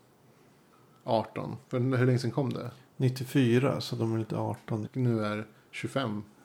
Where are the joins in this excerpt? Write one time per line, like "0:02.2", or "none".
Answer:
0:01.6
0:04.8